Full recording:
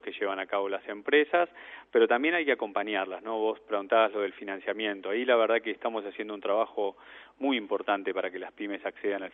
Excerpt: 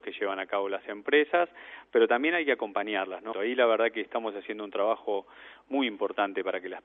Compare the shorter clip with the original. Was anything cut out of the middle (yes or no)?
yes